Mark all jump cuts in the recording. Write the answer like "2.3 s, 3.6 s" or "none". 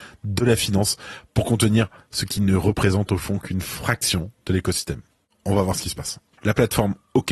6.4 s